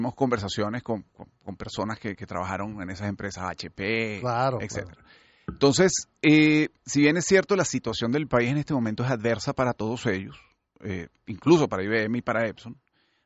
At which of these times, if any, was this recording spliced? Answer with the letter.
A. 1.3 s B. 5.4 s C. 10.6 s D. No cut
D